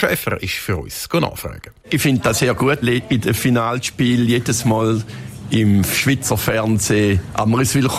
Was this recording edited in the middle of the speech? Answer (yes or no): yes